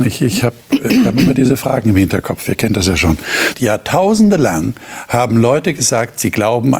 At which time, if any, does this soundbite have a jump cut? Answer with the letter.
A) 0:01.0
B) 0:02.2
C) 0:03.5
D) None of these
C